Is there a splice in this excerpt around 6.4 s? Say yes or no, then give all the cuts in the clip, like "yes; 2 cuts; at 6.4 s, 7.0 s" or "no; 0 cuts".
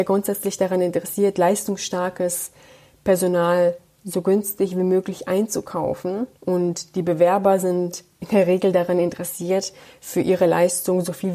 yes; 1 cut; at 6.4 s